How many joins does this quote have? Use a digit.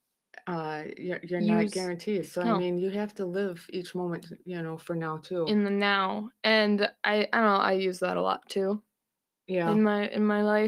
0